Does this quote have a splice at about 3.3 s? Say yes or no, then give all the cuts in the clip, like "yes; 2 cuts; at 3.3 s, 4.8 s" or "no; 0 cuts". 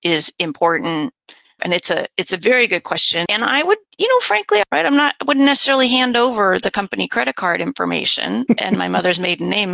yes; 3 cuts; at 1.6 s, 3.3 s, 4.6 s